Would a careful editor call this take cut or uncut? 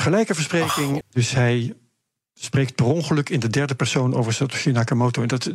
cut